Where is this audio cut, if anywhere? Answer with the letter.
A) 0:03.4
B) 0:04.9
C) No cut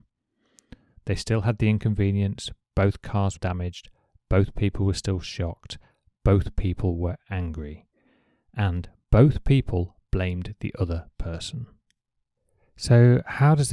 A